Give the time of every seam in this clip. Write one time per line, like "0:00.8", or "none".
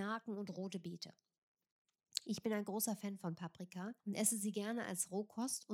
0:04.0